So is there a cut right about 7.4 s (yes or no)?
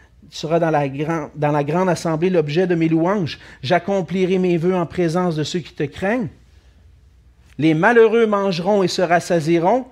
no